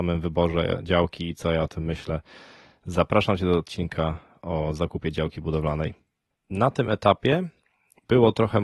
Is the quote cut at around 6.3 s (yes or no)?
yes